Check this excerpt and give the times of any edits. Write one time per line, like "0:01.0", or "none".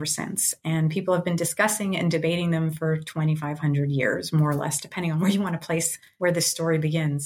none